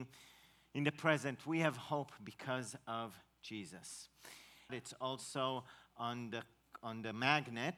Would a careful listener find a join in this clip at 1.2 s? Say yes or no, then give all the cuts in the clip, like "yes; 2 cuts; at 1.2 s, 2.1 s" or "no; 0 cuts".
no; 1 cut; at 4.7 s